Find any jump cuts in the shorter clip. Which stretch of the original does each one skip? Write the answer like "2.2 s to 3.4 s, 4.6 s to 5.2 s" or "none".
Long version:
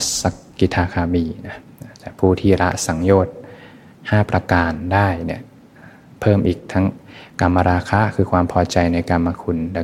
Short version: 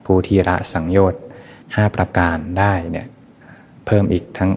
3.7 s to 4.0 s

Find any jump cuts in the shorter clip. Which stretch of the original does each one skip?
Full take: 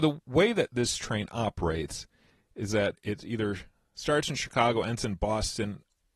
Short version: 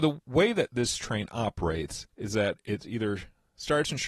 2.1 s to 2.5 s

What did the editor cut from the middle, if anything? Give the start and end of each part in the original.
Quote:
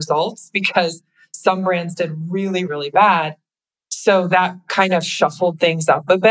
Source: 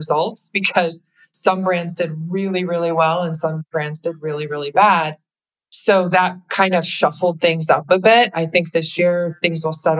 2.7 s to 4.5 s

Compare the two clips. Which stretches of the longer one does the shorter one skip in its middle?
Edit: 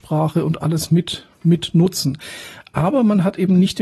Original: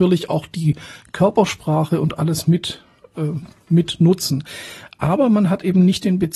2.9 s to 3.6 s

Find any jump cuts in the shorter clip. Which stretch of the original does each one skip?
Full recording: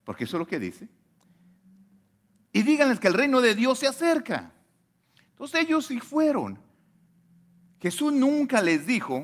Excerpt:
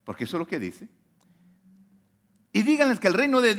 none

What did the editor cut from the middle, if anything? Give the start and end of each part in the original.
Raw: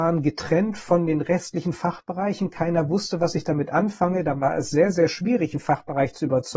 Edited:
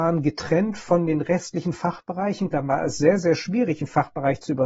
2.5 s to 4.2 s

